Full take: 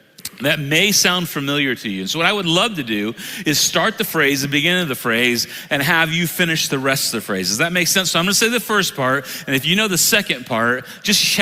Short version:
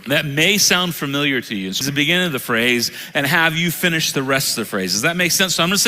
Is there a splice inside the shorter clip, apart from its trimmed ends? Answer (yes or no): yes